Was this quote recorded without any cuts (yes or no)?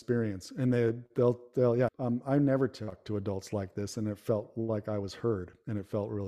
no